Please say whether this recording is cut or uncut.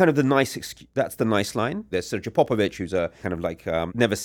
cut